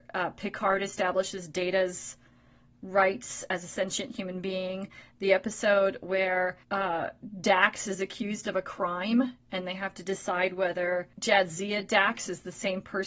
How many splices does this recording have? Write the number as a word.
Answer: two